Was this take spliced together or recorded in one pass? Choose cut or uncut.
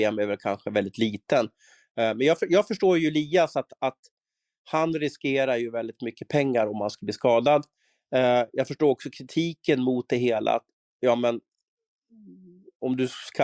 uncut